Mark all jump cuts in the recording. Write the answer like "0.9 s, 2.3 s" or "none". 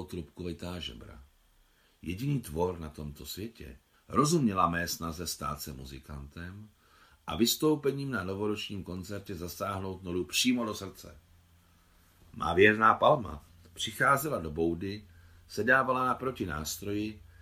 3.9 s